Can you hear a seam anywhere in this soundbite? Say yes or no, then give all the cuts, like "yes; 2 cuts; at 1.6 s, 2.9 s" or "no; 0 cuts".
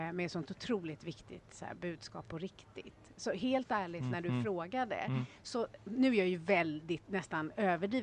no; 0 cuts